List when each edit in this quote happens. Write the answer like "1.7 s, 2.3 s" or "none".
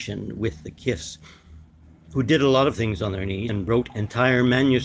3.5 s